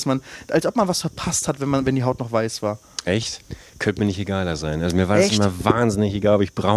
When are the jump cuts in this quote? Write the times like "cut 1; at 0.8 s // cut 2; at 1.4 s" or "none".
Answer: none